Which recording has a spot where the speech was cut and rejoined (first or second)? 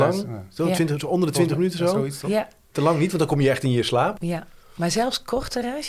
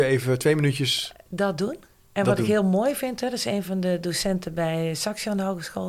first